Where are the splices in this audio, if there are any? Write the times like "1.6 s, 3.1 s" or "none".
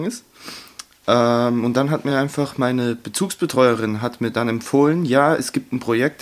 none